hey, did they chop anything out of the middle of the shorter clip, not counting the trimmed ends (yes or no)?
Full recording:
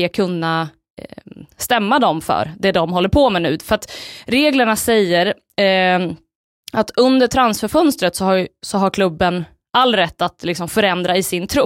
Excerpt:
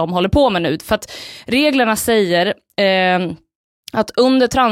no